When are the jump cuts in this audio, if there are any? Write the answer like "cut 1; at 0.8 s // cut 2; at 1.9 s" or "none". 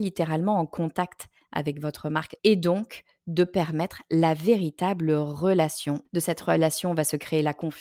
cut 1; at 2.4 s // cut 2; at 6.0 s